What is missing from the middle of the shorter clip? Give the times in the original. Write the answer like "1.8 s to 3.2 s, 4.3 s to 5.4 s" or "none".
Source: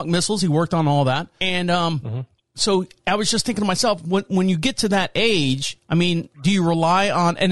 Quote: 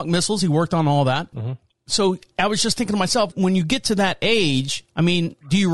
1.3 s to 2.0 s, 4.0 s to 4.2 s